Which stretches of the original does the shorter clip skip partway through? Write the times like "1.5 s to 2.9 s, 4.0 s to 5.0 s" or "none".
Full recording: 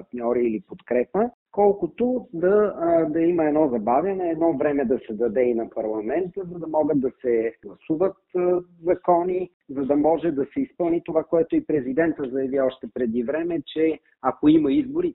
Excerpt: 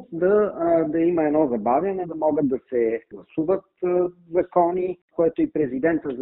4.2 s to 6.5 s, 9.6 s to 11.3 s